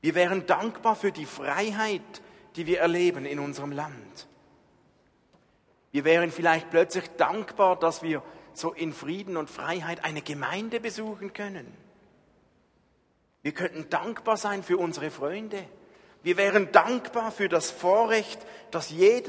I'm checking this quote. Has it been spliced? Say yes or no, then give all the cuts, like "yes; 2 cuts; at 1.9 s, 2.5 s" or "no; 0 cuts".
no; 0 cuts